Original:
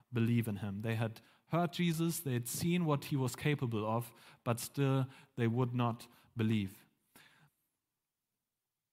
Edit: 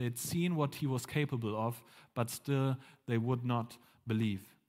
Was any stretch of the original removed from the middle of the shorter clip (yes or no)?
no